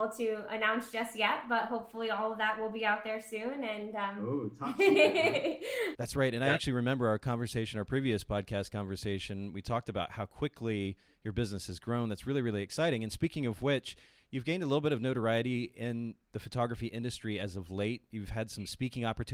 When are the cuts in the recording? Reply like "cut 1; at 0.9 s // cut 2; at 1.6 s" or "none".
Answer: cut 1; at 5.9 s